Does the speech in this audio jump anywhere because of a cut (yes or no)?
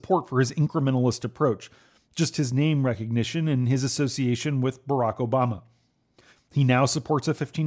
yes